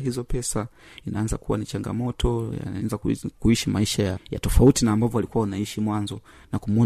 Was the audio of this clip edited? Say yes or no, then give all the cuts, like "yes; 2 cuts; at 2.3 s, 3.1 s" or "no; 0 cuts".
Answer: yes; 1 cut; at 4.1 s